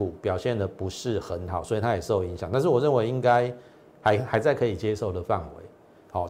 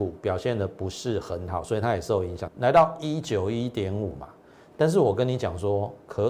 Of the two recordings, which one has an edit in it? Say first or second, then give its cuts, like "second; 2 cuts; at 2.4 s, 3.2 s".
second; 1 cut; at 2.5 s